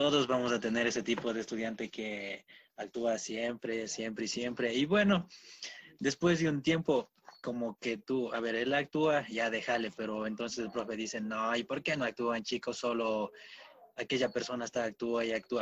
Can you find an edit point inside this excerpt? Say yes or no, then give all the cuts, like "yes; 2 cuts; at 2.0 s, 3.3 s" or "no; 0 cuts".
no; 0 cuts